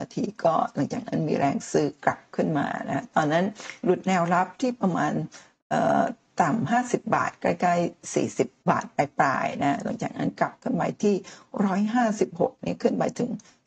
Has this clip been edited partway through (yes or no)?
yes